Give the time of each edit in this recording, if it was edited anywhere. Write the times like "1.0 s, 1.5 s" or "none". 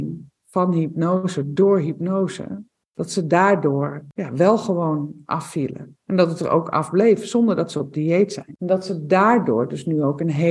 none